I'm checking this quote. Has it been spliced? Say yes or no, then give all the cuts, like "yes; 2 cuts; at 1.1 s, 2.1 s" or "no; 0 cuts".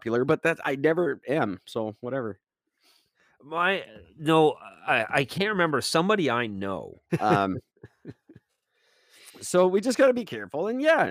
yes; 1 cut; at 7.1 s